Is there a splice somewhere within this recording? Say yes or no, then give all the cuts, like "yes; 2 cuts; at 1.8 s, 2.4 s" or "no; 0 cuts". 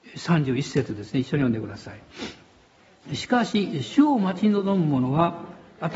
no; 0 cuts